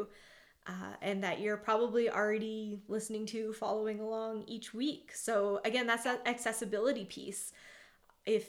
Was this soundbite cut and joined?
no; 0 cuts

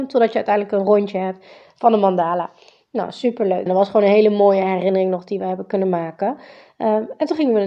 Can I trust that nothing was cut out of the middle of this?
no; 1 cut; at 3.7 s

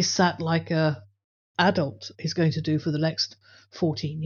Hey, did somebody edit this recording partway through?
no; 0 cuts

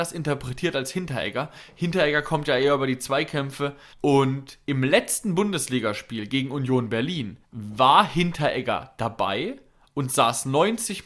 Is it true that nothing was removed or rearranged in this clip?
no; 2 cuts; at 3.9 s, 7.4 s

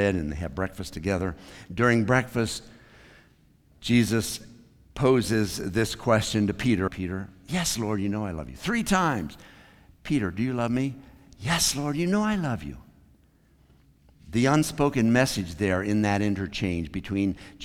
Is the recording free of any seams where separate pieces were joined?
no; 1 cut; at 6.9 s

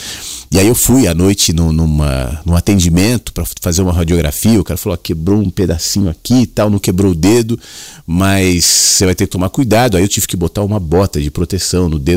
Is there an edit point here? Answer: no; 0 cuts

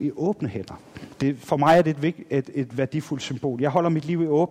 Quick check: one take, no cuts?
yes; 0 cuts

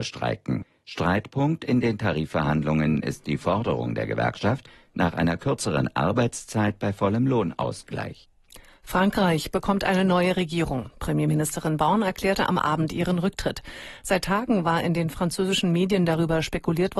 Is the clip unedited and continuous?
yes; 0 cuts

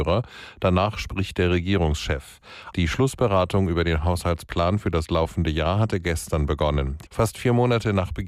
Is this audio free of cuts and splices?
no; 2 cuts; at 2.7 s, 7.1 s

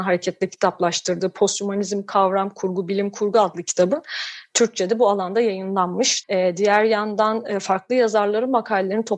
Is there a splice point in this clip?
yes; 1 cut; at 6.2 s

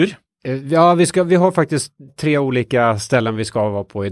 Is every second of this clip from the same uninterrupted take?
no; 1 cut; at 2.1 s

